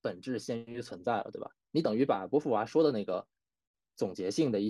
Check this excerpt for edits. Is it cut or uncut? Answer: uncut